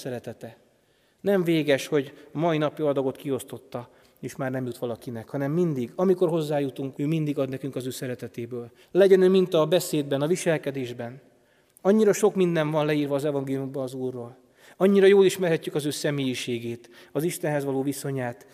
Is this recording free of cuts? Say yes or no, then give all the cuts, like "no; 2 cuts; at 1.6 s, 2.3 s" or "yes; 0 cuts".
no; 2 cuts; at 6.9 s, 8.8 s